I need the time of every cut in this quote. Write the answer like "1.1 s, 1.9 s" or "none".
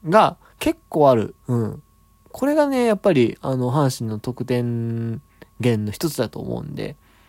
1.4 s